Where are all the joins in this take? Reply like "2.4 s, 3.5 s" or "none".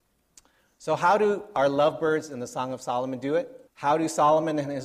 3.7 s